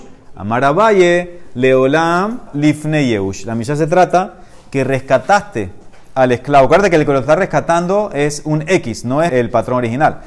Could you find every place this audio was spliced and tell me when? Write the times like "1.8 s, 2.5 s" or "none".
2.5 s, 9.3 s